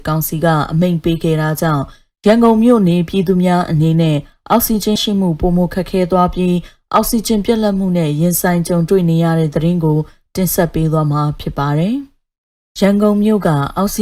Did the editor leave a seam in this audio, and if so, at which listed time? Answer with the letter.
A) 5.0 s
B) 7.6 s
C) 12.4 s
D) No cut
A